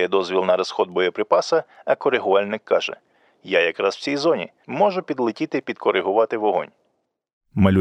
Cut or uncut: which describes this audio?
uncut